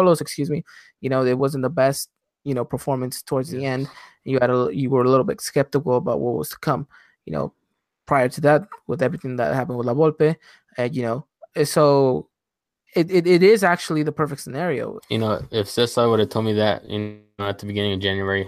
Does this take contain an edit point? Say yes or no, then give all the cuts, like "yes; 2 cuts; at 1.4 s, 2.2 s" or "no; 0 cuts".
yes; 1 cut; at 15.0 s